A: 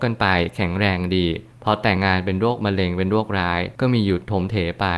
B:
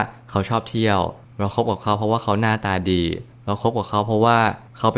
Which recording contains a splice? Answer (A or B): A